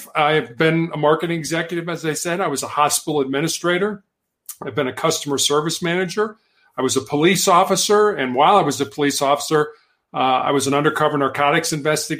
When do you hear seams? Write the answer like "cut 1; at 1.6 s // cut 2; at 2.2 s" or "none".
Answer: none